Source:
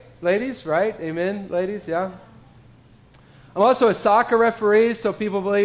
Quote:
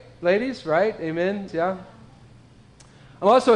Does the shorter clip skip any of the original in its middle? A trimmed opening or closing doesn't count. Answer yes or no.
yes